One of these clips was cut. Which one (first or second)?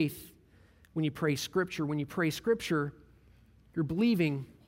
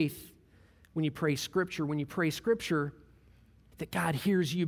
second